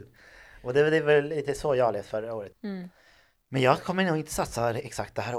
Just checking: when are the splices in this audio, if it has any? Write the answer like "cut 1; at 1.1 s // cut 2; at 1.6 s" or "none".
cut 1; at 2.5 s